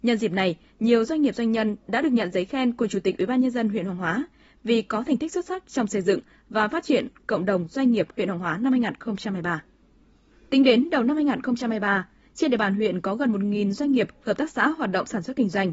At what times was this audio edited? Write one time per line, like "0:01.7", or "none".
0:10.3